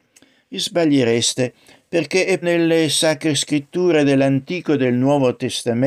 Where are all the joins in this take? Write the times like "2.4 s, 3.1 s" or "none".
2.4 s